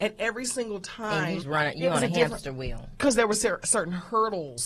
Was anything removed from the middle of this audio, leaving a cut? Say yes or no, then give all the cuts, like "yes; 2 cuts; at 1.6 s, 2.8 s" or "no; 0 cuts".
yes; 1 cut; at 1.4 s